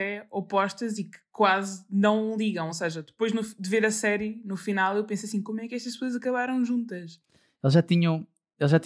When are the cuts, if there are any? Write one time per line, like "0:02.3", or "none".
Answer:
none